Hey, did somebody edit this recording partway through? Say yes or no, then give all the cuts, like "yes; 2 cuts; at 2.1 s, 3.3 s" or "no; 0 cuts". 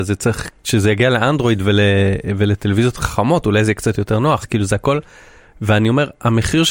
yes; 1 cut; at 4.4 s